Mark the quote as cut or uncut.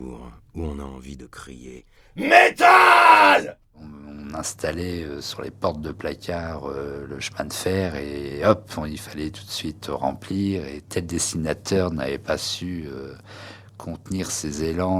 uncut